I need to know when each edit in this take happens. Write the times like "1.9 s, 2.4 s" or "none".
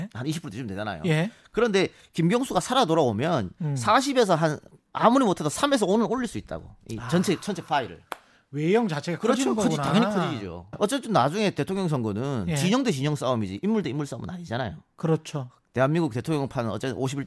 10.7 s